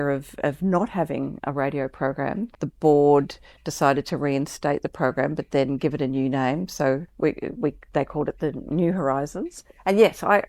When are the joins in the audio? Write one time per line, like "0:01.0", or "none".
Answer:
0:02.5
0:07.1